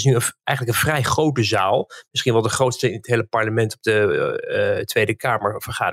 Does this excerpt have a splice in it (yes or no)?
no